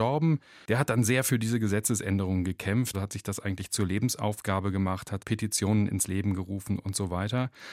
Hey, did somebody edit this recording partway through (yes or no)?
yes